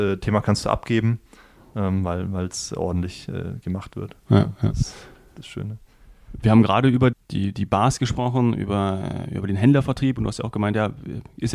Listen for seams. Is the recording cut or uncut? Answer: cut